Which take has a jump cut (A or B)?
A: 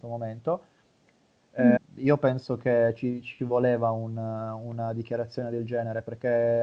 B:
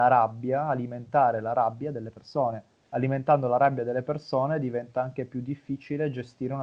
A